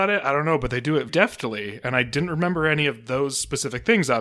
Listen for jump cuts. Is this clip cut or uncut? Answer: cut